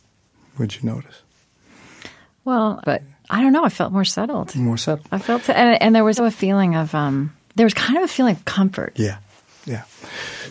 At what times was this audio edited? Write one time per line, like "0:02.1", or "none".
0:02.8
0:06.2

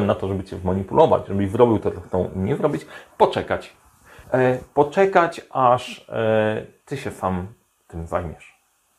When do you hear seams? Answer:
0:04.2

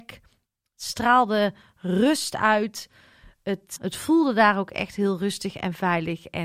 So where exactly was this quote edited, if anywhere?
0:03.8

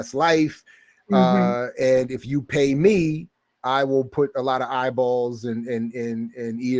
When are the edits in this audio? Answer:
none

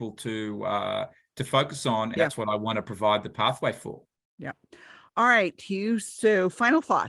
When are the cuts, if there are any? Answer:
0:02.2

